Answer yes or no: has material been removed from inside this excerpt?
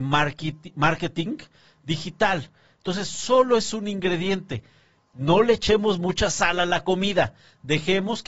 no